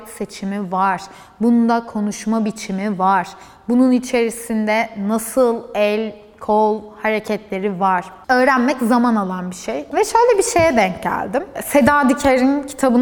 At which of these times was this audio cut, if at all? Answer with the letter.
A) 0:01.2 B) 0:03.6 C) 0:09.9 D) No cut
C